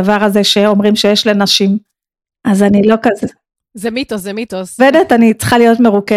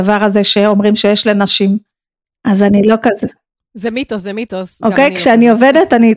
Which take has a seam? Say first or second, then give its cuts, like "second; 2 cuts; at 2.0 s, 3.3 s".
first; 1 cut; at 4.8 s